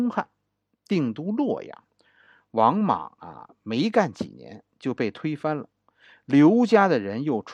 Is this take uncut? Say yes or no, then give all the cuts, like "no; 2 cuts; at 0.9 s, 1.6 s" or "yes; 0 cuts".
yes; 0 cuts